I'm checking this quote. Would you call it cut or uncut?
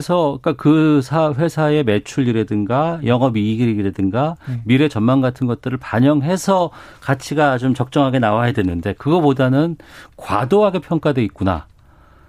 uncut